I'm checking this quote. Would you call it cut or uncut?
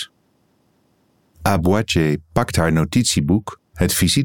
uncut